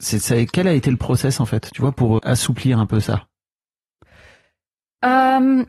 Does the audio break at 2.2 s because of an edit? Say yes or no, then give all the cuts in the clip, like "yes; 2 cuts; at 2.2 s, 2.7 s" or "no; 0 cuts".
yes; 1 cut; at 2.2 s